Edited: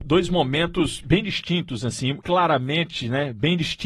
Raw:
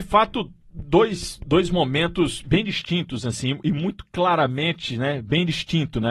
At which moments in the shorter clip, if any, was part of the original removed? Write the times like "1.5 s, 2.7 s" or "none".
2.2 s